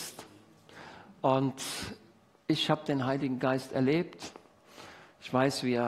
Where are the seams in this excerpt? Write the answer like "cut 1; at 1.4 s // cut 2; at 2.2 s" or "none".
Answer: none